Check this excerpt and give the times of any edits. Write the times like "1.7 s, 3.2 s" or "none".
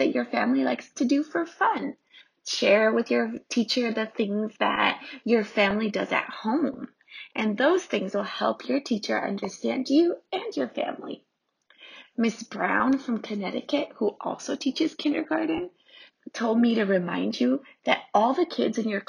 none